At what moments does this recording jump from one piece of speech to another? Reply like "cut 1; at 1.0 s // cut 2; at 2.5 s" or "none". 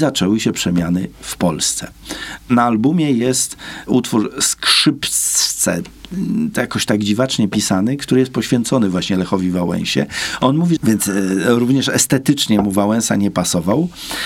cut 1; at 2.4 s // cut 2; at 10.8 s